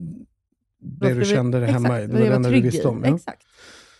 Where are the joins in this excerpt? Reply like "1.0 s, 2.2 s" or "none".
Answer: 1.0 s